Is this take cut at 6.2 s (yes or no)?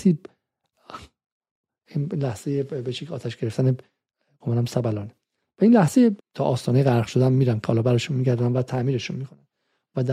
yes